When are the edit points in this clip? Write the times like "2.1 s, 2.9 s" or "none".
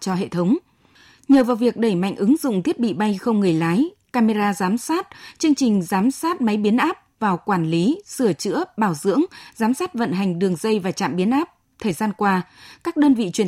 none